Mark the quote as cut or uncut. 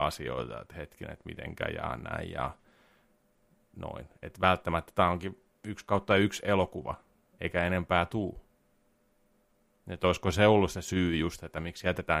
uncut